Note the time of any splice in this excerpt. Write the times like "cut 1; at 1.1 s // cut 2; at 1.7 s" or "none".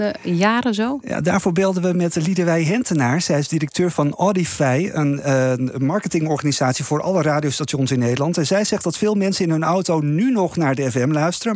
none

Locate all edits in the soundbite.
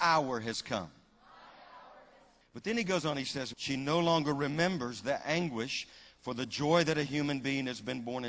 cut 1; at 2.4 s // cut 2; at 3.5 s

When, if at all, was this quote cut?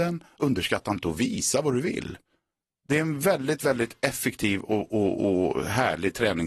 none

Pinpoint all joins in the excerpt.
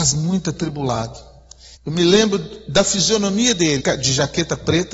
cut 1; at 1.8 s // cut 2; at 3.8 s

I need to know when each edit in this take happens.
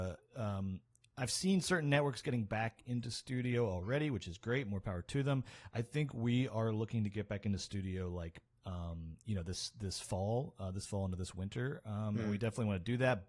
none

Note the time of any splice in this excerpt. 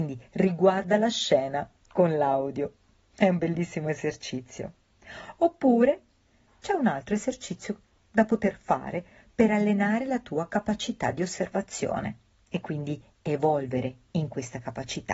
none

